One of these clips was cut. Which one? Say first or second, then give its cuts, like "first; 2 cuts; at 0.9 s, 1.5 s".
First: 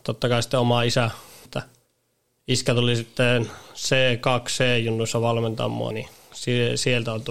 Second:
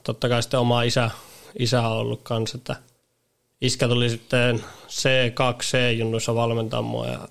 first; 2 cuts; at 1.5 s, 5.9 s